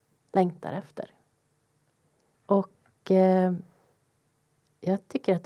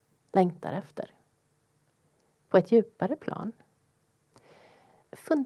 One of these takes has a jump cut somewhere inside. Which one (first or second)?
first